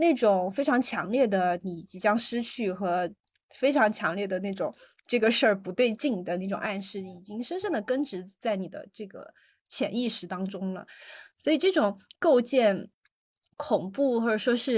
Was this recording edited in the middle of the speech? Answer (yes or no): no